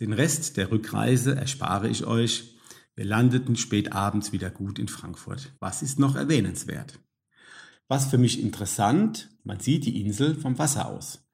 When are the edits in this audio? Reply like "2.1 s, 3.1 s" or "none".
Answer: 5.6 s, 7.7 s, 9.4 s

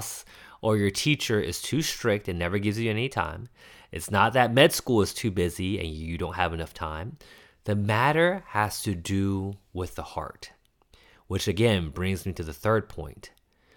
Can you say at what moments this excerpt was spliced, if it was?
none

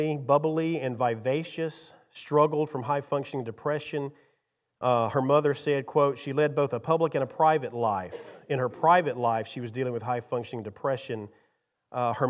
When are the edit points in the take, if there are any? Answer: none

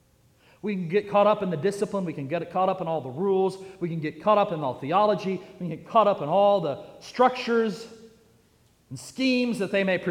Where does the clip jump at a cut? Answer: none

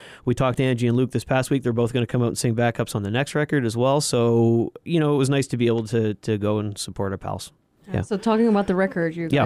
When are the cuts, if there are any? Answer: none

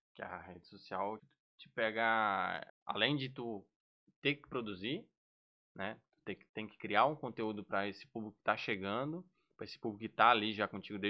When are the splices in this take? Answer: 1.2 s, 2.7 s, 6.5 s

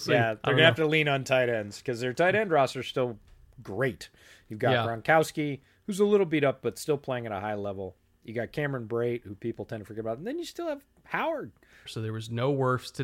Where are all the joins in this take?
11.9 s

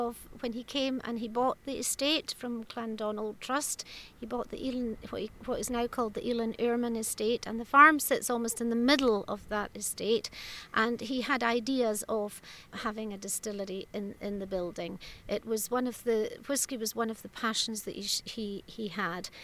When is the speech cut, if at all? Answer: none

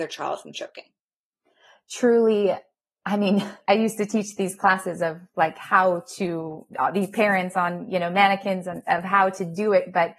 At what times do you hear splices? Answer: none

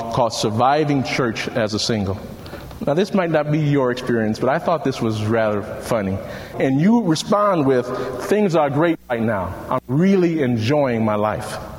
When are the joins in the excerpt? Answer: 6.5 s

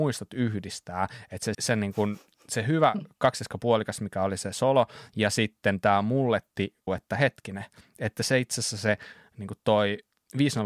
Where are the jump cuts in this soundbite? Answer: 1.5 s, 6.9 s

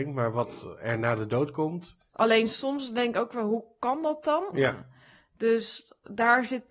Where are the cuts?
2.1 s, 4.5 s

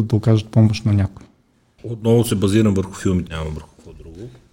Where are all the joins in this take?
1.8 s, 3.3 s

